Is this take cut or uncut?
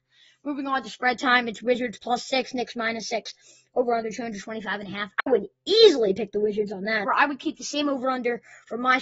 cut